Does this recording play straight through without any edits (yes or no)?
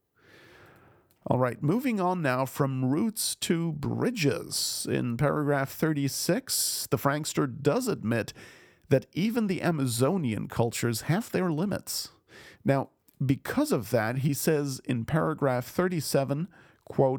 no